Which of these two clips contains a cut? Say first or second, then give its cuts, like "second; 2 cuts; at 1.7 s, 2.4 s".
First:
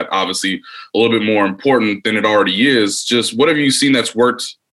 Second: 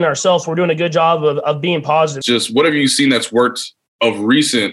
second; 1 cut; at 2.2 s